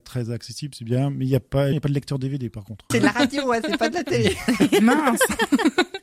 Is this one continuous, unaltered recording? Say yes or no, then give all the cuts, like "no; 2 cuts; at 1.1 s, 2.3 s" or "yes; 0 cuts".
no; 2 cuts; at 1.7 s, 2.9 s